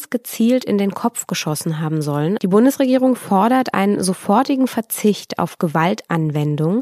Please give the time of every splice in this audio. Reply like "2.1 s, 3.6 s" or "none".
2.4 s